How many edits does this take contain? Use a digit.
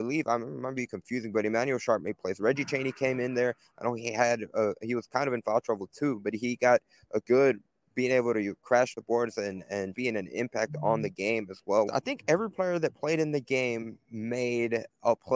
2